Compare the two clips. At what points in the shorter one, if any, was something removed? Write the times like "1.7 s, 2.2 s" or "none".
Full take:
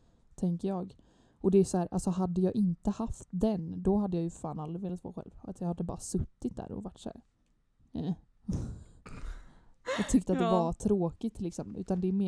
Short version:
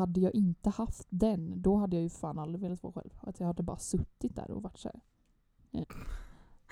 5.8 s